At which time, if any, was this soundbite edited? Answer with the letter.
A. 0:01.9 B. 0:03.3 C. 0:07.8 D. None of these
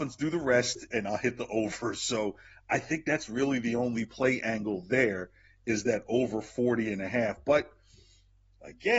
D